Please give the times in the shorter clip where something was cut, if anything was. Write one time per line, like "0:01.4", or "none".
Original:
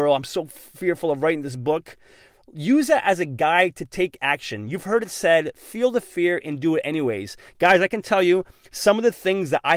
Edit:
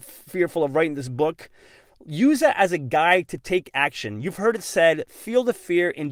none